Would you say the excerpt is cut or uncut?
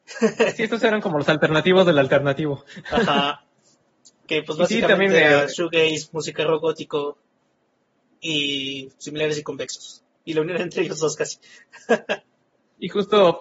uncut